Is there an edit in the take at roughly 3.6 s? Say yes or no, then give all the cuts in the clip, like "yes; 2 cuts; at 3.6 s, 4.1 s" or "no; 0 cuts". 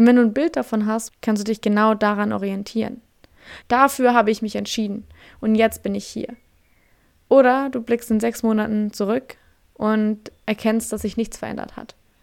yes; 2 cuts; at 1.1 s, 3.6 s